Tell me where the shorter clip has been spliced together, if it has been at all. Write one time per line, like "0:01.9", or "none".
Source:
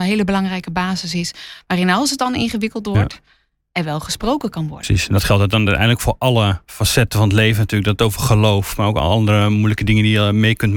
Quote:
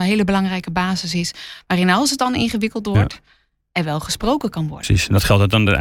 none